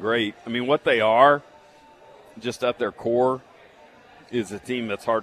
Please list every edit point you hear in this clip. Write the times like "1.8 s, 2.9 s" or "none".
none